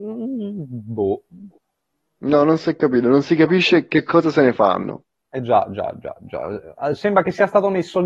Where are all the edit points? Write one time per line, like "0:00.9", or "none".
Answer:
none